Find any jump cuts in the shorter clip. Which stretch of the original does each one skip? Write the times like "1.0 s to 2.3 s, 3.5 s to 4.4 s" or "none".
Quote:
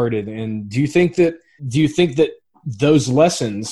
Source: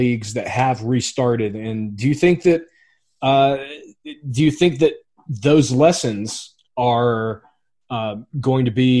2.9 s to 4.2 s

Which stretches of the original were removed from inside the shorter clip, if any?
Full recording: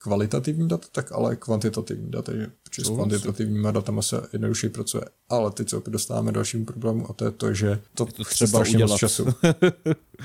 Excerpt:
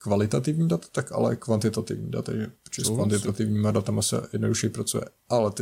none

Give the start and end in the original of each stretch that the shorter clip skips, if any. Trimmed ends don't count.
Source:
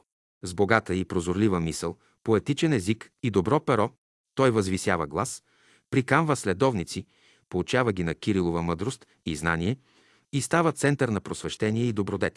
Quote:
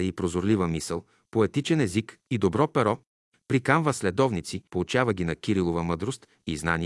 4.3 s to 5.8 s, 7.1 s to 7.5 s

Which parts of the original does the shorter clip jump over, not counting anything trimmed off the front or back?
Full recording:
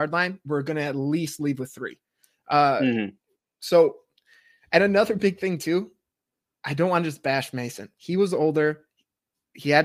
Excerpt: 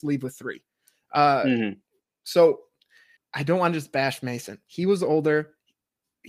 4.5 s to 6.5 s

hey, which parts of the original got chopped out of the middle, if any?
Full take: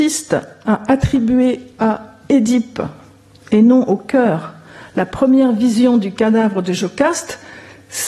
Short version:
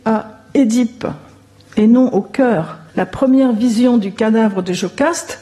4.6 s to 4.9 s

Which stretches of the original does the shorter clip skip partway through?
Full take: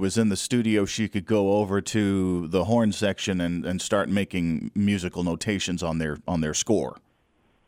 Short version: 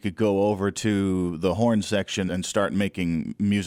3.4 s to 3.6 s

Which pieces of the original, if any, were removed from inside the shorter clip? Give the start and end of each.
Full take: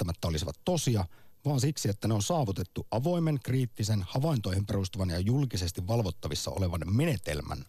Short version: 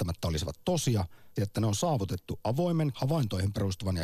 1.4 s to 1.8 s, 3.4 s to 4.1 s

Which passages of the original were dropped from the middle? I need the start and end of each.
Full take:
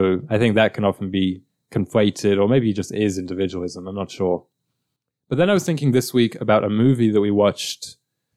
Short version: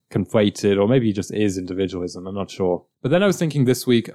4.5 s to 5.2 s

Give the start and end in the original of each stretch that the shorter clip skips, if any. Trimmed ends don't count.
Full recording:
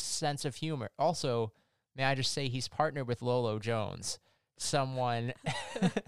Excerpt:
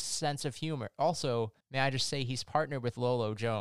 1.6 s to 1.8 s

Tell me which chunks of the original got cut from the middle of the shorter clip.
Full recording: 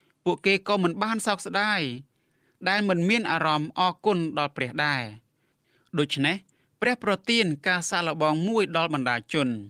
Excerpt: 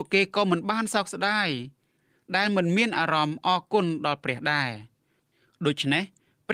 none

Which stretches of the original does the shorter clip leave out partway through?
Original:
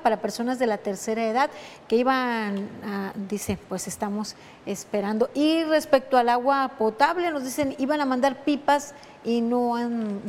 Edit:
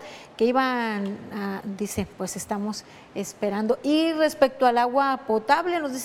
none

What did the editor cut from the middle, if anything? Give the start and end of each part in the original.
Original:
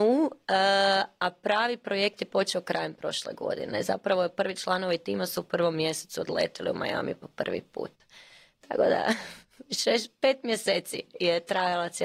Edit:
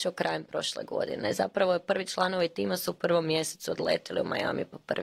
none

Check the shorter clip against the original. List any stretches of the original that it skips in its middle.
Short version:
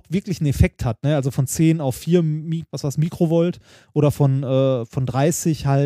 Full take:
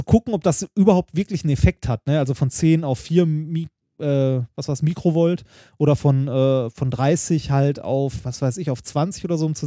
3.7 s to 4.5 s

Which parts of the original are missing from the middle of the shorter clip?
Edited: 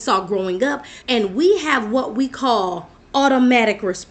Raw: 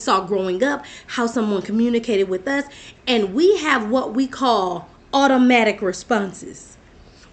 1.0 s to 3.0 s

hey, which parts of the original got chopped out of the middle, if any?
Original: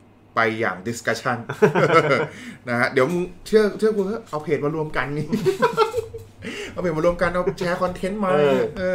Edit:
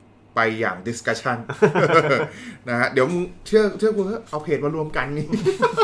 none

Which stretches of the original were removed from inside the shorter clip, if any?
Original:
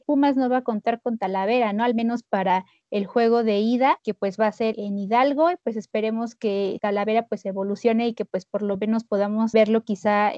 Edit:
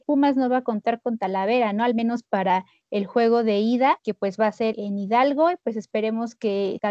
none

